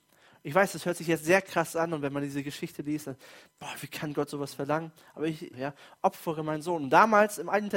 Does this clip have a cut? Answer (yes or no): yes